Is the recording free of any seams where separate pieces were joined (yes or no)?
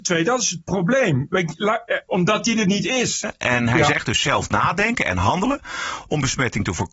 no